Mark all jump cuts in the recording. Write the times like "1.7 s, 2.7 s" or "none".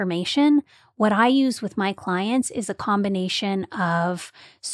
none